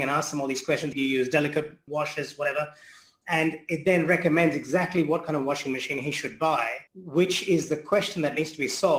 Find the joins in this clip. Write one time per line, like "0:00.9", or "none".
0:00.9
0:06.9